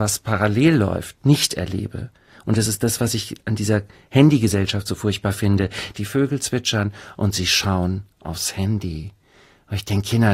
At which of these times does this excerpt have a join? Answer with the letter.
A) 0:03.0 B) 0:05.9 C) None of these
B